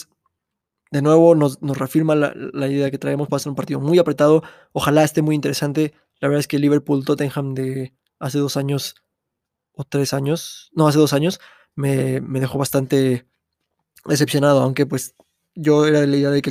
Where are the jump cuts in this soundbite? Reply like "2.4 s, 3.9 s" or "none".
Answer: none